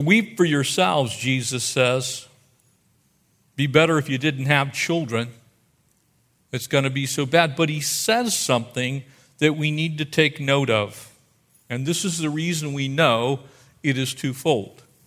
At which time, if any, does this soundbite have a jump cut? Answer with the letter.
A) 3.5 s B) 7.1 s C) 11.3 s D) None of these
D